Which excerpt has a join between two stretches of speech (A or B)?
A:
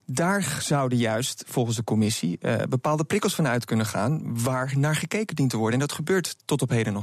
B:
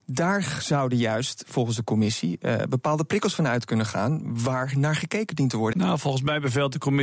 B